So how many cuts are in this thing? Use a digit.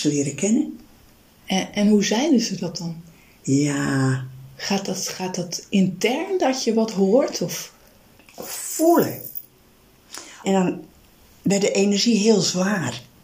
3